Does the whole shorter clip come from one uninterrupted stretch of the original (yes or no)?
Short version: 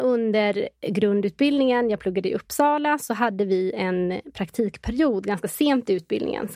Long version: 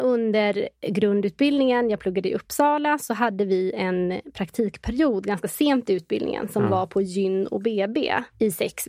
yes